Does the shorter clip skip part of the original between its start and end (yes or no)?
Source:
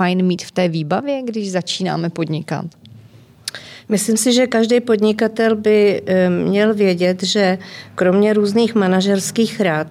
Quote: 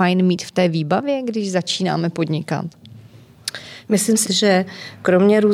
yes